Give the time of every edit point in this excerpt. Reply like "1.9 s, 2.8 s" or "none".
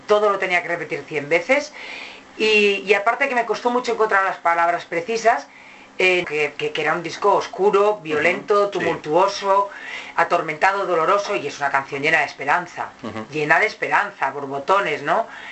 6.2 s